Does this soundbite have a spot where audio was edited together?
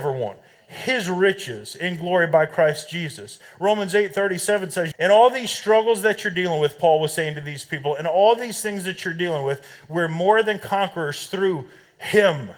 yes; 1 cut; at 4.9 s

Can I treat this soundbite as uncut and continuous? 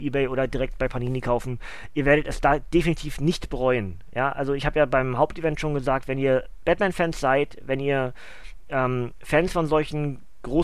yes; 0 cuts

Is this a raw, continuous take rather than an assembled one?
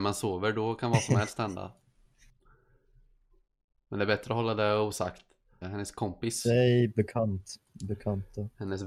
no; 1 cut; at 5.6 s

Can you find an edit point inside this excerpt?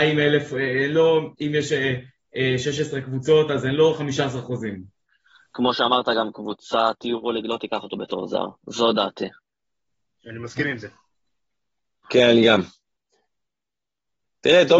no; 0 cuts

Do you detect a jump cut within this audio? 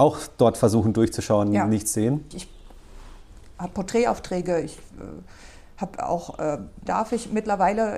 yes; 2 cuts; at 2.3 s, 6.9 s

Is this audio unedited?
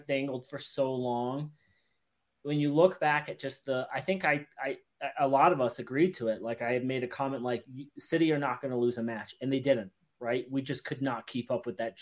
yes; 0 cuts

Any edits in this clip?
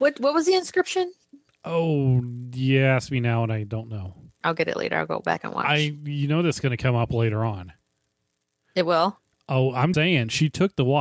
yes; 2 cuts; at 4.4 s, 9.9 s

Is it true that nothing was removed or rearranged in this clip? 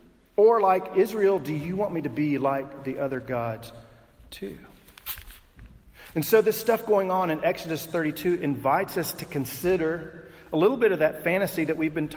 yes; 0 cuts

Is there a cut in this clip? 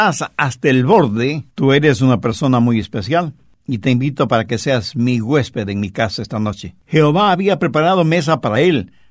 yes; 2 cuts; at 1.5 s, 6.8 s

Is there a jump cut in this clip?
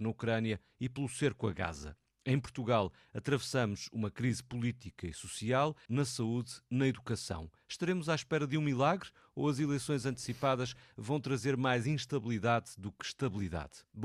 yes; 1 cut; at 5.9 s

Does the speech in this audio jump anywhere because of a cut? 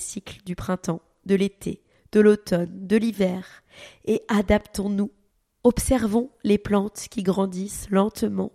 no; 0 cuts

